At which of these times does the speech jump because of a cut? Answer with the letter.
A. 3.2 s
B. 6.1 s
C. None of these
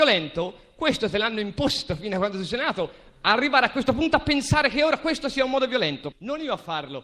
B